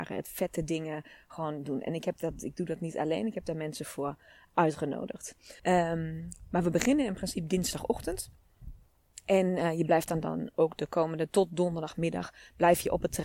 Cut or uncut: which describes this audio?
cut